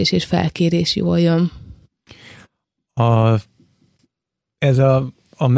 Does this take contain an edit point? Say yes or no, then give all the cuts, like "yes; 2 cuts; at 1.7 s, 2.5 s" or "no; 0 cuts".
no; 0 cuts